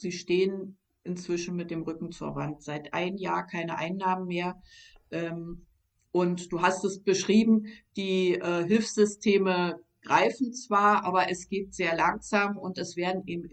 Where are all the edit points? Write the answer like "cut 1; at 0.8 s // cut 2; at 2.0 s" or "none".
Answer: none

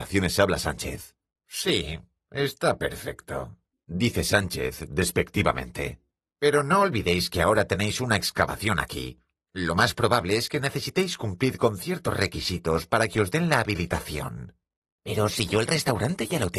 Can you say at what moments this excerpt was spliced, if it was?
cut 1; at 1.3 s

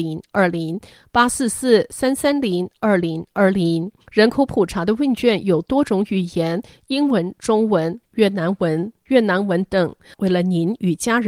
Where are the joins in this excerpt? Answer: cut 1; at 4.0 s // cut 2; at 8.1 s // cut 3; at 10.1 s

